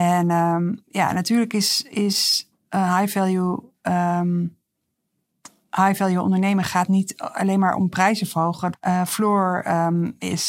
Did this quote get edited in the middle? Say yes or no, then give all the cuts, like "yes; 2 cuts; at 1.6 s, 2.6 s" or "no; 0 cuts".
yes; 1 cut; at 8.7 s